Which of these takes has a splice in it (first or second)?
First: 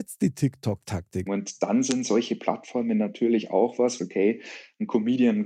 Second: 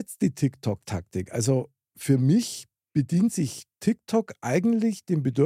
first